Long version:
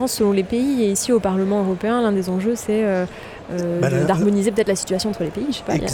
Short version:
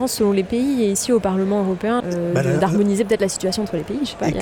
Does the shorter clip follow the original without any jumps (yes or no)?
no